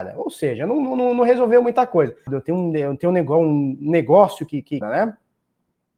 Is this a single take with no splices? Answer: no; 2 cuts; at 2.3 s, 4.8 s

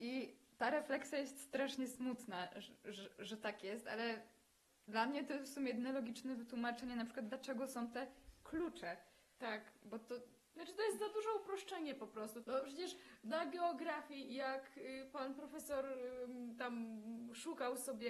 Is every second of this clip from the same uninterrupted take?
no; 1 cut; at 12.4 s

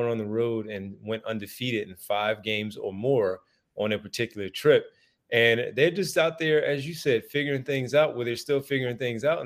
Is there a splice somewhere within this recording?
no; 0 cuts

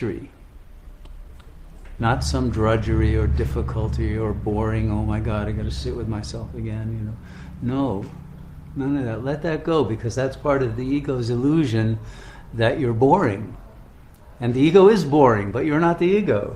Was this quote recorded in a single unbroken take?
no; 1 cut; at 2.0 s

